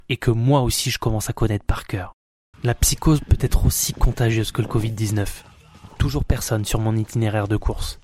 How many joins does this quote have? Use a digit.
2